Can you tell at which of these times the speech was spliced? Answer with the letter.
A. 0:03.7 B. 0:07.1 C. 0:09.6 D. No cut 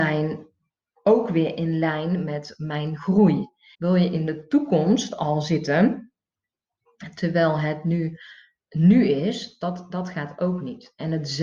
A